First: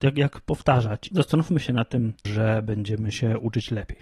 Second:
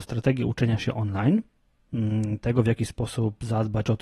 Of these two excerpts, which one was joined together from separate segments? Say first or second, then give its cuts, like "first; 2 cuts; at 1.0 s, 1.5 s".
first; 2 cuts; at 1.1 s, 2.2 s